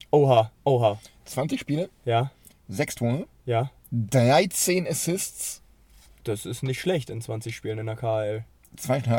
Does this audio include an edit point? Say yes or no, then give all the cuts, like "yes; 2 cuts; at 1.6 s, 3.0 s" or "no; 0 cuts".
no; 0 cuts